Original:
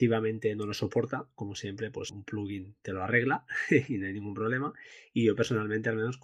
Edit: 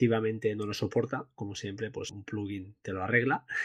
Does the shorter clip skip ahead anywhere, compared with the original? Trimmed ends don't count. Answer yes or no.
no